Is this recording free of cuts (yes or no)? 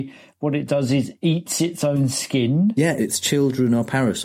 no